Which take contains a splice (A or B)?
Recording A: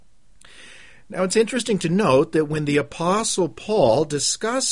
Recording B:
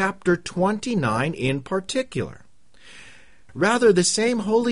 B